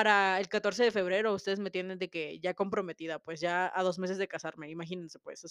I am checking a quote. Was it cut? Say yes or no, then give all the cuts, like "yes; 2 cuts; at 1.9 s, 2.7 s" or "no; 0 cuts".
no; 0 cuts